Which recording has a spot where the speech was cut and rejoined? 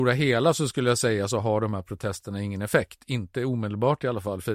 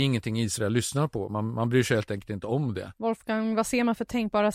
second; 1 cut; at 2.9 s

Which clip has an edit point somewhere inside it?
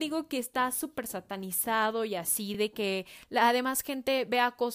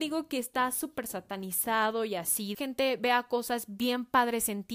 second; 1 cut; at 2.5 s

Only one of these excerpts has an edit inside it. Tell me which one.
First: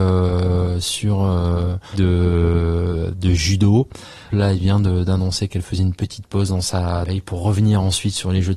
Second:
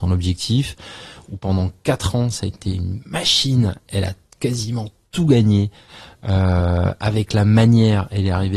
first; 3 cuts; at 1.9 s, 4.3 s, 7.1 s

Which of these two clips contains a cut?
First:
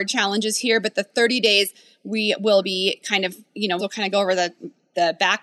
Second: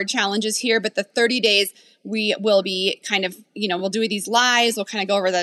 first; 1 cut; at 3.8 s

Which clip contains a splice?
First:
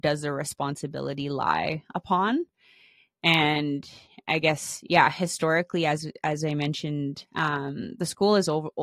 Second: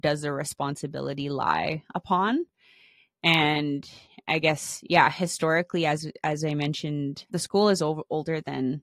second; 1 cut; at 7.3 s

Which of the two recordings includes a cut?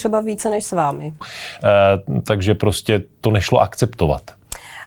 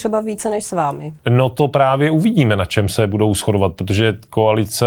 first; 1 cut; at 1.2 s

